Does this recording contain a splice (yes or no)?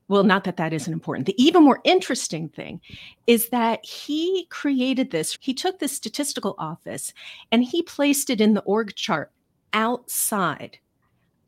yes